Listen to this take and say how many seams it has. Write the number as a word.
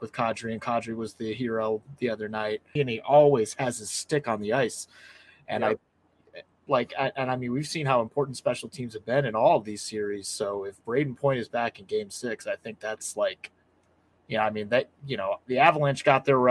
one